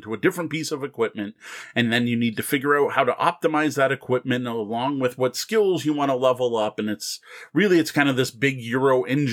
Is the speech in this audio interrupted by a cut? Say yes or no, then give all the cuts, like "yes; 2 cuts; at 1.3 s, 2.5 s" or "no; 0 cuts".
no; 0 cuts